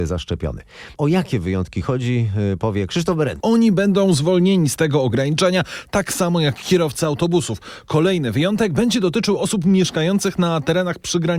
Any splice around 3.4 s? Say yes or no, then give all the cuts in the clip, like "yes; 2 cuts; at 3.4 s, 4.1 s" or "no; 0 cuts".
yes; 2 cuts; at 1.0 s, 3.4 s